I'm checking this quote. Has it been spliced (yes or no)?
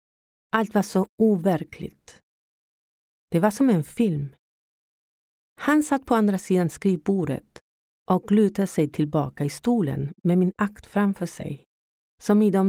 no